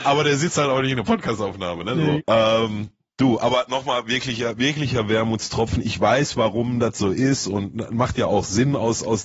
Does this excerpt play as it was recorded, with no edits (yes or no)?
no